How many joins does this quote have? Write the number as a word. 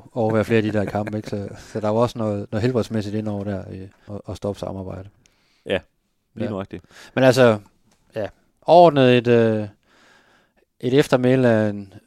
one